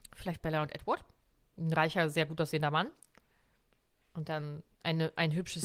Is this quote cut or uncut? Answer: cut